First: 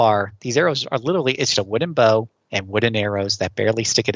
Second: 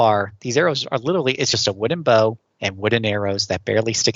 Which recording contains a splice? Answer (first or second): first